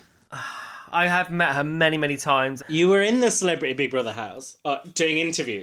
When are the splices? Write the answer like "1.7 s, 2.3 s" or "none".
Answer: 2.6 s